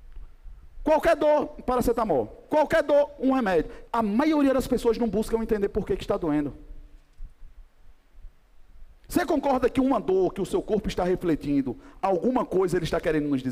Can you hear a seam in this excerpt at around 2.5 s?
no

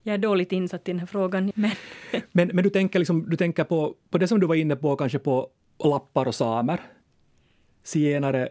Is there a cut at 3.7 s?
no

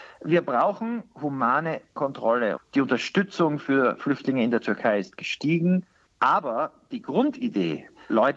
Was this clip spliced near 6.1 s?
yes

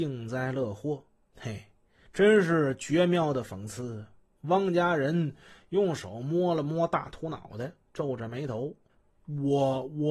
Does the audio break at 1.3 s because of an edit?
yes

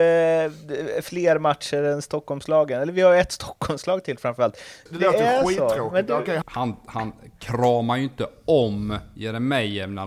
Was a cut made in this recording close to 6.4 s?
yes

